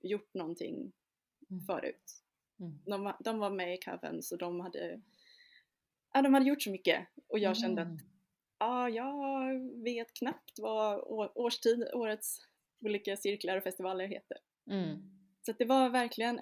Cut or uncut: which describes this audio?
uncut